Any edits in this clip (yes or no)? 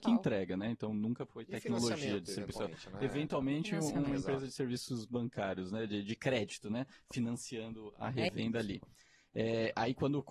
no